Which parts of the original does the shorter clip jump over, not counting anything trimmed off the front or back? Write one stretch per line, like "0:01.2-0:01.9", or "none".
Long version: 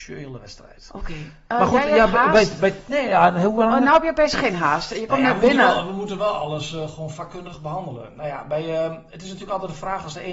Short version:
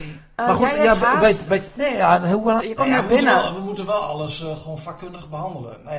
0:03.7-0:04.9